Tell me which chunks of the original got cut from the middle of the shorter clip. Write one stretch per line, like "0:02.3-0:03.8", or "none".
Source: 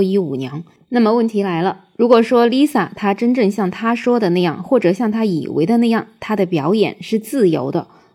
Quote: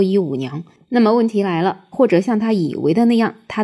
0:01.9-0:04.6